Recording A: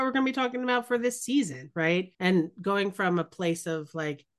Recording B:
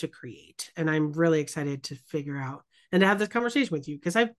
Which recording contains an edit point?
A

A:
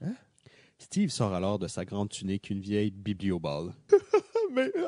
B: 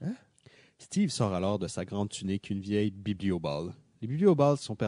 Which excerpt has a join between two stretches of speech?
A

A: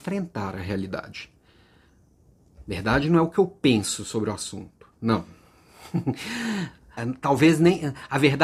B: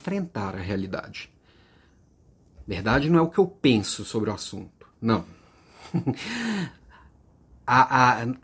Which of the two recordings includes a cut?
A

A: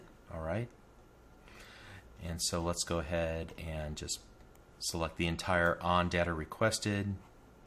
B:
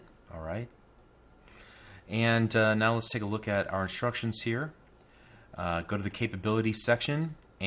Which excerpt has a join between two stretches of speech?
A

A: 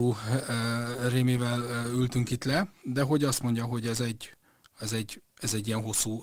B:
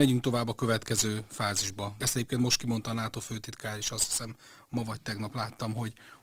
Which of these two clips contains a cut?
B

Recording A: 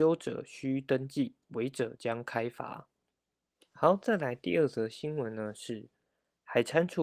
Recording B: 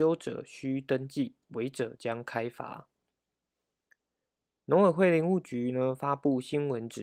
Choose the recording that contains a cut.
A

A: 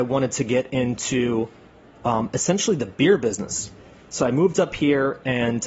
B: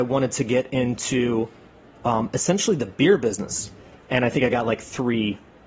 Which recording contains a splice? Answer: B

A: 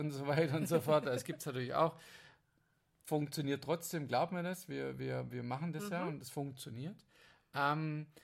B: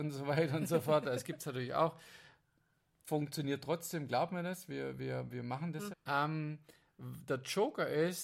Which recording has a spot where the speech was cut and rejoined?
B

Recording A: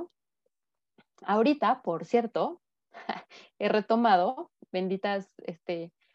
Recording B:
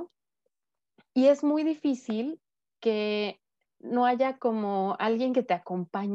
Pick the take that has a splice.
B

